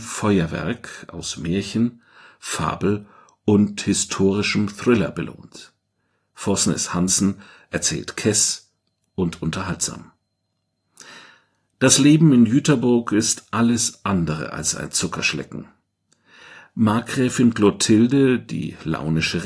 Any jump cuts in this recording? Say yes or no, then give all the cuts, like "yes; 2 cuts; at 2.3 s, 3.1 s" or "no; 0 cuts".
no; 0 cuts